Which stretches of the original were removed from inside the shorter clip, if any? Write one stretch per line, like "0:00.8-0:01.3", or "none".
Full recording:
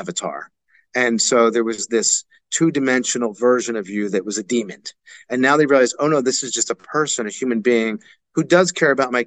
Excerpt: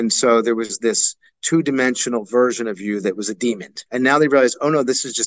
0:04.9-0:05.2